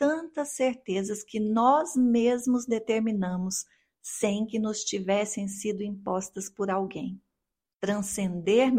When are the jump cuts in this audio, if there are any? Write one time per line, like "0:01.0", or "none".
0:07.7